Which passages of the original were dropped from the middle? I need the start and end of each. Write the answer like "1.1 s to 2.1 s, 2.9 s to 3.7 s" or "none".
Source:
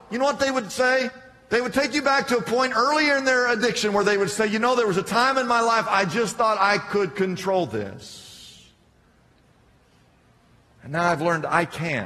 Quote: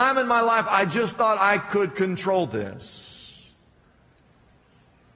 none

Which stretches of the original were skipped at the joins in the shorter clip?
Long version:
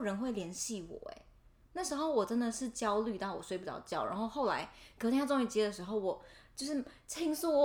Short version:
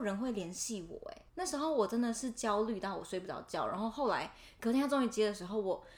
1.3 s to 1.7 s

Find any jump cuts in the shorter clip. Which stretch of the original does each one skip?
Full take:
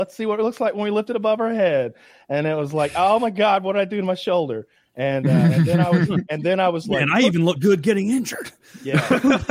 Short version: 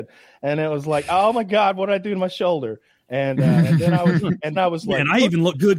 6.4 s to 6.6 s

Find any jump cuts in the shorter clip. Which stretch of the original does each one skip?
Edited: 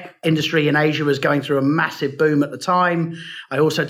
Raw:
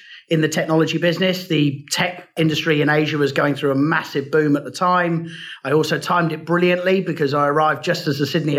none

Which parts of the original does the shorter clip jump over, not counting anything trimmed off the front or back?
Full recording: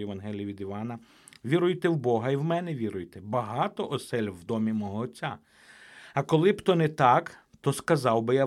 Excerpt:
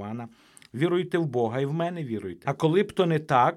3.1 s to 6.1 s

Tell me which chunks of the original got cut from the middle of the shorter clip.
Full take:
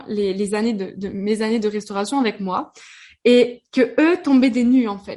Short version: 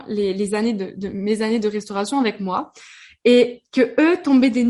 none

